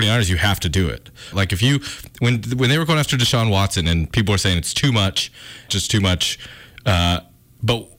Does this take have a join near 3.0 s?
no; 2 cuts; at 1.3 s, 5.7 s

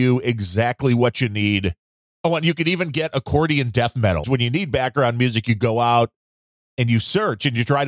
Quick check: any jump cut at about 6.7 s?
no; 2 cuts; at 2.1 s, 4.2 s

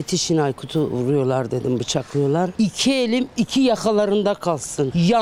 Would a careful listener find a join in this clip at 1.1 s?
no; 1 cut; at 2.5 s

